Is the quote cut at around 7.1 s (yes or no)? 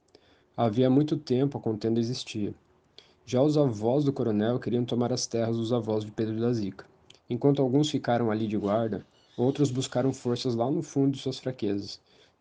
yes